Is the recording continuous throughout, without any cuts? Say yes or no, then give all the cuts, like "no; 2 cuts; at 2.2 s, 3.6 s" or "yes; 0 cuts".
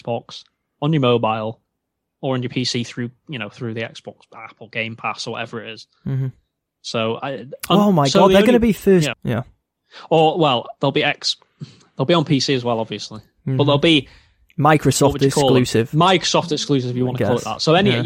no; 1 cut; at 9.1 s